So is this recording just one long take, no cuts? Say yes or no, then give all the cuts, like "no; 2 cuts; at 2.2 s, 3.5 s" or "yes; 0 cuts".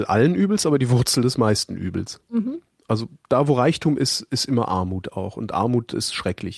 yes; 0 cuts